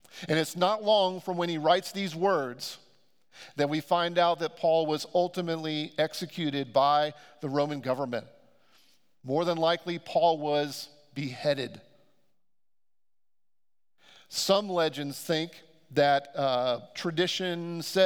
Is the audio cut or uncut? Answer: uncut